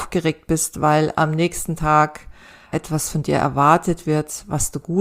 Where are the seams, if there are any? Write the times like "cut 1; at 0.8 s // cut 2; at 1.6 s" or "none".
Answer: cut 1; at 2.7 s